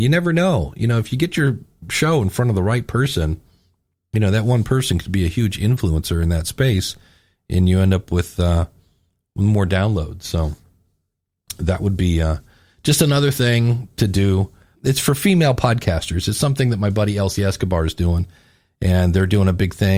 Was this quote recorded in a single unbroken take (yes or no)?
yes